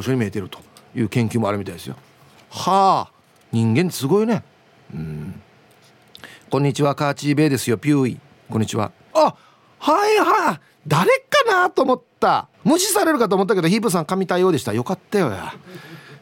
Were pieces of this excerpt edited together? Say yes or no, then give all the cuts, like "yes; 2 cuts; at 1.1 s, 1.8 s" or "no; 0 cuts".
yes; 2 cuts; at 9.1 s, 12.5 s